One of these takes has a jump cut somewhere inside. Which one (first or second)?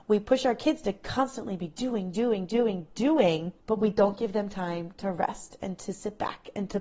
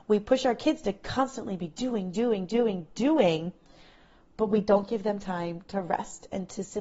first